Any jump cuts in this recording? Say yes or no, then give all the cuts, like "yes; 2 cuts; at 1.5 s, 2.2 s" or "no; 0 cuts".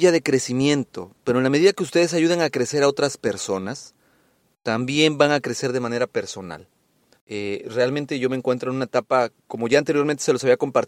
yes; 1 cut; at 7.1 s